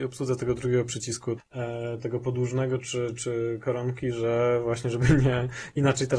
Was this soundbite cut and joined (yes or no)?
yes